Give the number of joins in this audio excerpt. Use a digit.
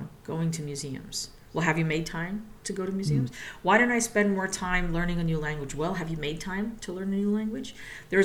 0